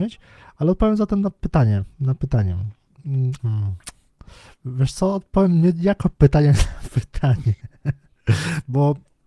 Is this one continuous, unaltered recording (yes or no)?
no